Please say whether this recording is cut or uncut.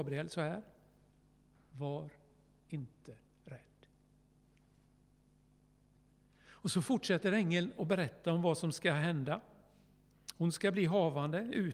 uncut